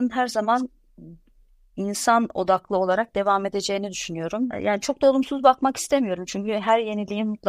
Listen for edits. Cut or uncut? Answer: cut